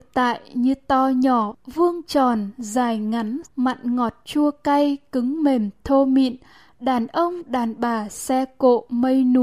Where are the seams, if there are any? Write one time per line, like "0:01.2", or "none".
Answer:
0:03.4